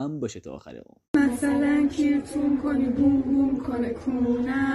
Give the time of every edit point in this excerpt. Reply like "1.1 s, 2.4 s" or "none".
1.0 s